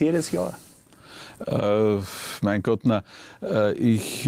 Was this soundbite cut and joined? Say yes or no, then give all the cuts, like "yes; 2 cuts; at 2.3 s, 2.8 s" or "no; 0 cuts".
no; 0 cuts